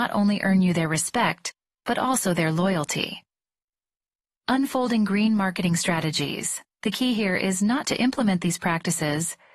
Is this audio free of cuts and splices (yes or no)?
no